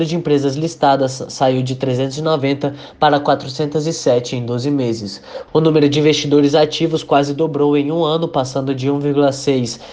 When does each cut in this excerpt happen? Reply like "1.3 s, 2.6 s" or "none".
5.5 s